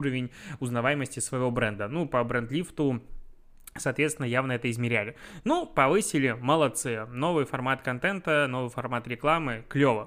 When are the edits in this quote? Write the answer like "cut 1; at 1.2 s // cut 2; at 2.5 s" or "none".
none